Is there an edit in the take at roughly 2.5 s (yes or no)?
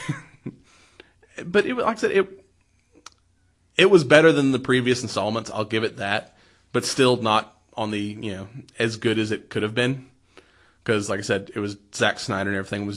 no